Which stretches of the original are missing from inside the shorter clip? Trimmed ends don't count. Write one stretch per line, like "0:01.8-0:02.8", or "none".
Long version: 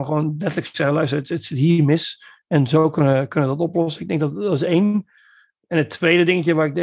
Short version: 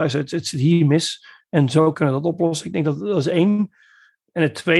0:02.9-0:03.3